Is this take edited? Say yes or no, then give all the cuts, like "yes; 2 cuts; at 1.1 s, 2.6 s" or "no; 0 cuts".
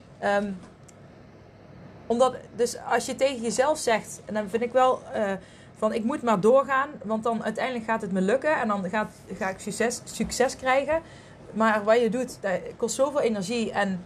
no; 0 cuts